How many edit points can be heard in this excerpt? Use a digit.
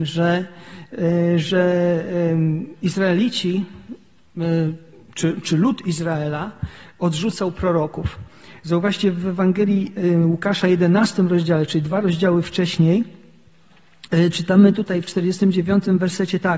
0